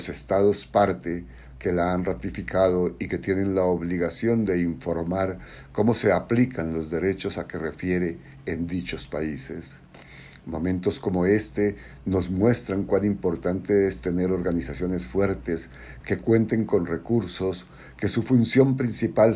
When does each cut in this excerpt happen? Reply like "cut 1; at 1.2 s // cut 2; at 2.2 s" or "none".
cut 1; at 16.0 s